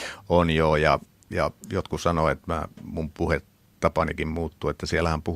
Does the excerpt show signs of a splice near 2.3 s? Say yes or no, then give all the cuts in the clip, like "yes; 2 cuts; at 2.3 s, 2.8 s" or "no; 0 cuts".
no; 0 cuts